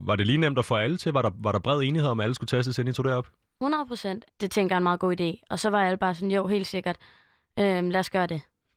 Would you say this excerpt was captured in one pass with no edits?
no; 1 cut; at 4.3 s

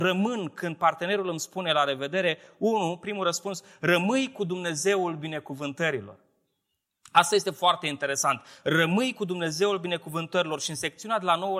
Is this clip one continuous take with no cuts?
yes; 0 cuts

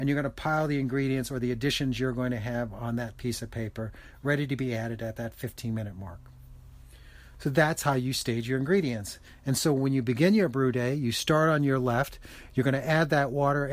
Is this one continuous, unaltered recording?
yes; 0 cuts

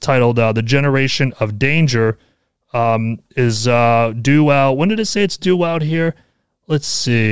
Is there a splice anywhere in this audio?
no; 0 cuts

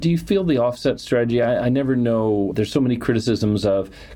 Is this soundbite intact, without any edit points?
yes; 0 cuts

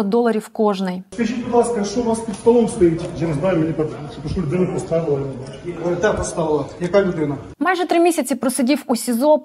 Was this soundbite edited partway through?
no; 0 cuts

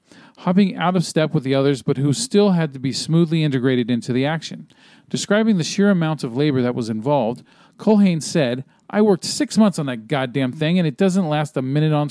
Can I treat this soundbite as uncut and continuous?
yes; 0 cuts

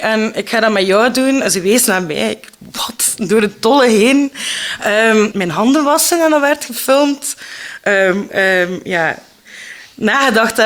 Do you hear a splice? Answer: yes; 2 cuts; at 5.3 s, 8.3 s

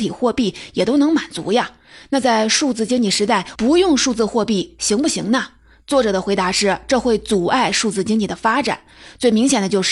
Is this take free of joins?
no; 1 cut; at 3.5 s

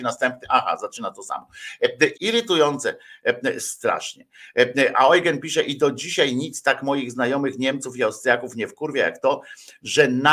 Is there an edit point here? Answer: yes; 1 cut; at 2.1 s

